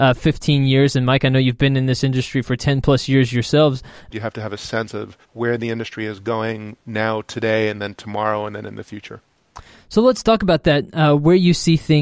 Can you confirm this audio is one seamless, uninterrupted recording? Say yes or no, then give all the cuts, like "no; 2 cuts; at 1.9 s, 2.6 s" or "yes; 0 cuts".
no; 2 cuts; at 4.1 s, 5.2 s